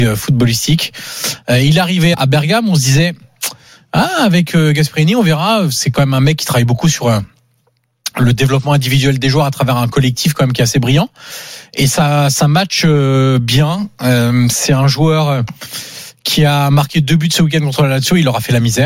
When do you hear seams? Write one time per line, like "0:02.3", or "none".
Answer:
0:02.1